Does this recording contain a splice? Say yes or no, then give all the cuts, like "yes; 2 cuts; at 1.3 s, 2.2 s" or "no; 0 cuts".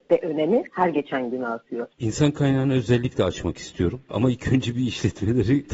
yes; 1 cut; at 1.9 s